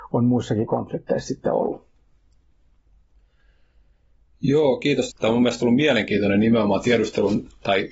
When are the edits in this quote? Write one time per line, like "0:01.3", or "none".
0:05.1